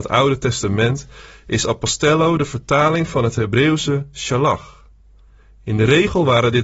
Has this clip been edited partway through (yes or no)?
no